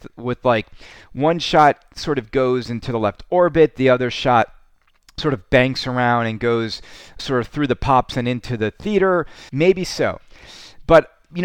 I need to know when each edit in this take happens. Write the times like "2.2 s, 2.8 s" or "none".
7.2 s, 9.5 s